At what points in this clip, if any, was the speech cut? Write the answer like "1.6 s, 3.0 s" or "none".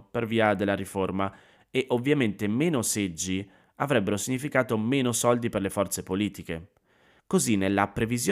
7.2 s